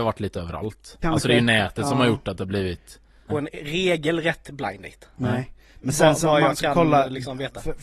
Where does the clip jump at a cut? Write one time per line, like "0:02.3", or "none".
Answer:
0:01.0
0:03.3